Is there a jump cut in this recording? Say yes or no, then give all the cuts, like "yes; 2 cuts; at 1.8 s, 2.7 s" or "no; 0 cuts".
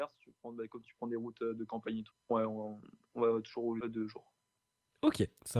yes; 2 cuts; at 2.1 s, 3.8 s